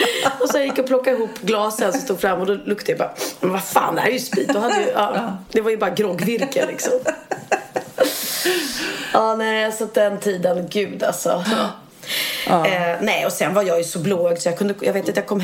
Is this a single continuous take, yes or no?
no